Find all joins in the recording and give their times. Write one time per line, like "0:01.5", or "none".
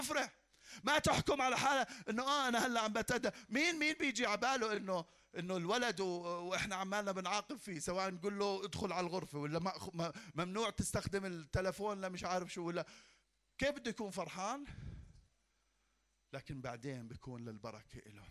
none